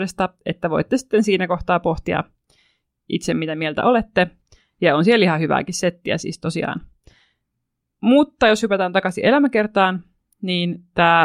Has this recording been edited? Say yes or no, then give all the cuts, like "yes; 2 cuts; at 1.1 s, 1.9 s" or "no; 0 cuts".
no; 0 cuts